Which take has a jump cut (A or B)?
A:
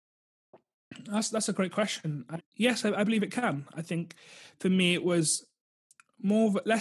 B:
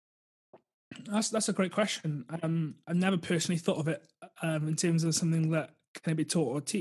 A